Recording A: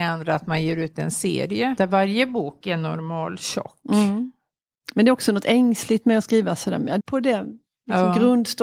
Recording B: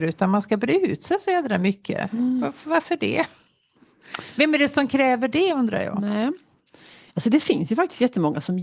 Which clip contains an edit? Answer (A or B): A